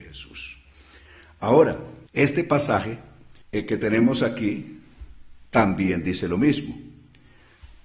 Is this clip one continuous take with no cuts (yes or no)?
no